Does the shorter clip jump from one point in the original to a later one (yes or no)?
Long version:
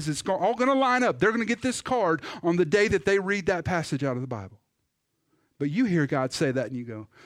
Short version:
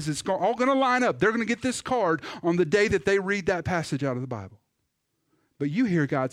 no